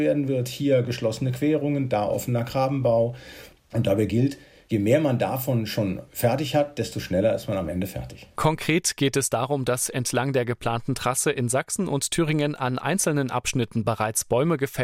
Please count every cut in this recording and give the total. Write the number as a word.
zero